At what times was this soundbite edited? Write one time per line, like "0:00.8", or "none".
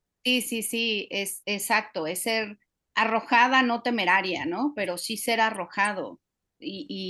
0:01.4

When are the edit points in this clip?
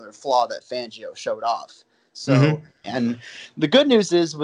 0:02.8

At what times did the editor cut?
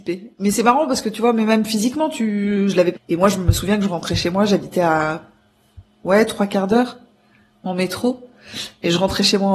0:03.0

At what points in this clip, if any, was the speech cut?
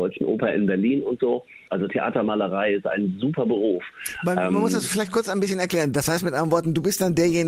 0:01.7

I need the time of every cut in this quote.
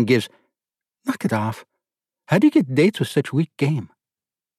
none

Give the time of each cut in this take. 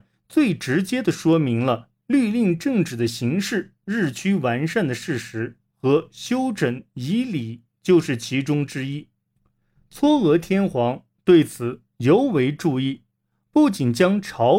0:05.7

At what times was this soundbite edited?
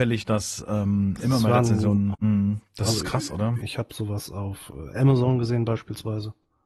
0:02.1
0:03.6

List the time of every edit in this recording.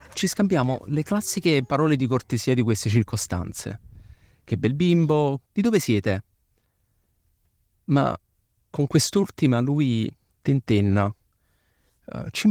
0:05.5

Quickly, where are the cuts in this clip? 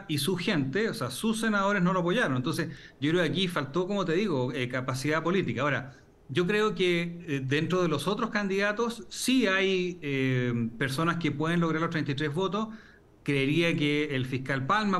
none

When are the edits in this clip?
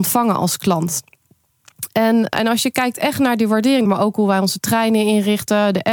0:02.3
0:03.8

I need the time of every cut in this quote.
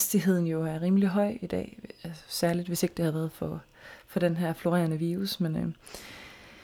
none

